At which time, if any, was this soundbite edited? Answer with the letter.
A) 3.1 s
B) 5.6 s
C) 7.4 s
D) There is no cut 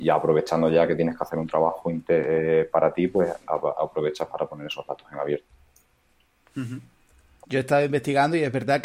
C